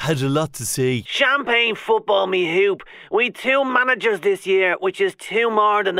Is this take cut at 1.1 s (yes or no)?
yes